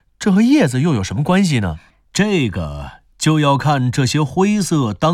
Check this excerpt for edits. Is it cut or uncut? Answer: cut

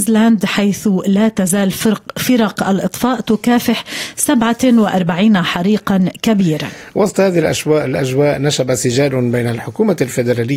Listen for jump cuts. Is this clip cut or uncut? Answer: uncut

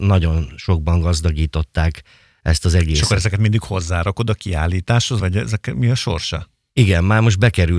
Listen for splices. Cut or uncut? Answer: cut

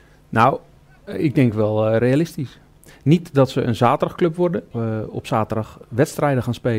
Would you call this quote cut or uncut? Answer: cut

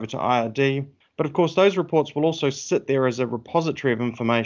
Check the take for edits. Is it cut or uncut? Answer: cut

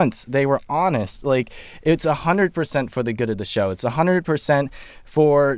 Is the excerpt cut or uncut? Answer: uncut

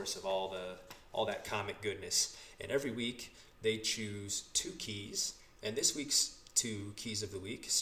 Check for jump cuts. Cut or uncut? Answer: uncut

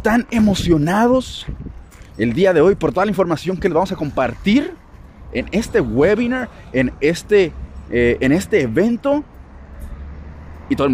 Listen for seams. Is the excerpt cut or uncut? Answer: uncut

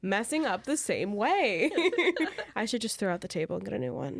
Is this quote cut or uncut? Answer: uncut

